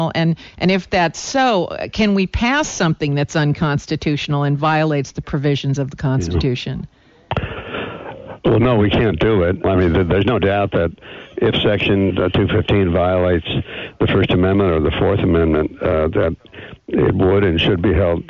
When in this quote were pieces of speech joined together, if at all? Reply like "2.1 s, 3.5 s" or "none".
9.6 s, 12.1 s